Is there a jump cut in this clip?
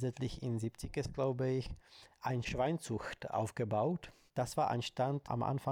no; 0 cuts

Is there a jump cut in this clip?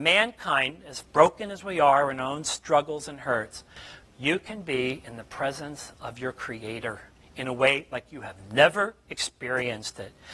yes; 1 cut; at 4.0 s

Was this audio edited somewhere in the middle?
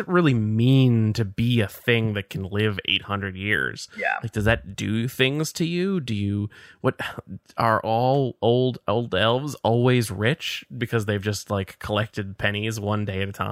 no; 0 cuts

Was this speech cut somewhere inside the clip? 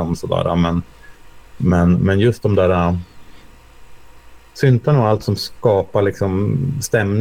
no; 0 cuts

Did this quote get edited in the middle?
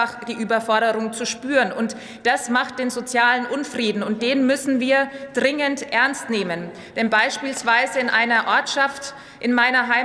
no; 0 cuts

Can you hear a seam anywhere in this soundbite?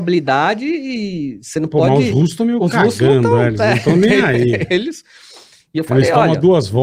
no; 0 cuts

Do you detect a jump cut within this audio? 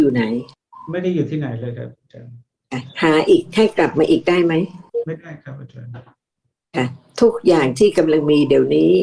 no; 0 cuts

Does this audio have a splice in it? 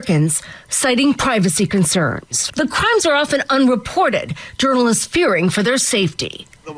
yes; 1 cut; at 2.5 s

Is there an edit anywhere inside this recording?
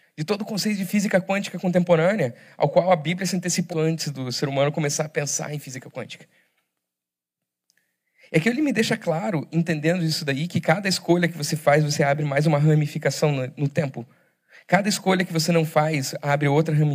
yes; 1 cut; at 3.7 s

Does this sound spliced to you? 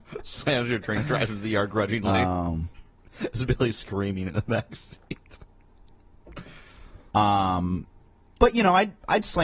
yes; 1 cut; at 7.1 s

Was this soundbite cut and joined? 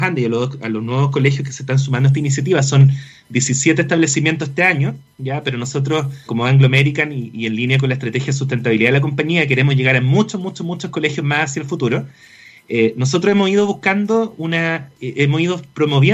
yes; 1 cut; at 6.3 s

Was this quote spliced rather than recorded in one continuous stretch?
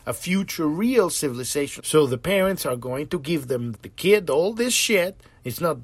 yes; 2 cuts; at 1.8 s, 3.7 s

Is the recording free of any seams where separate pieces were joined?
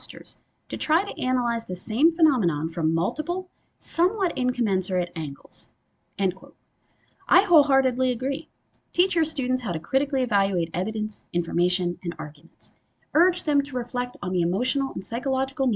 no; 1 cut; at 13.0 s

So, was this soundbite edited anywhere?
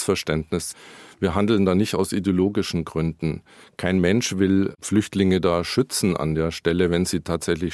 no; 0 cuts

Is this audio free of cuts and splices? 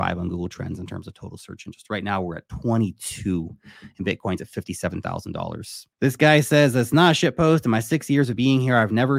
no; 1 cut; at 5.9 s

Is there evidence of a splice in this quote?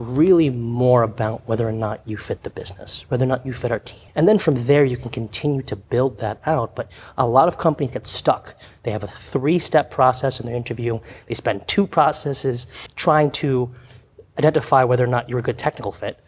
yes; 2 cuts; at 4.1 s, 12.9 s

